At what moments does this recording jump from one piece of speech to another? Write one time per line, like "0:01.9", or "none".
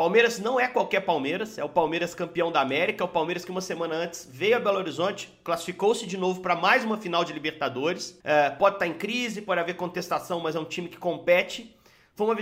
0:08.2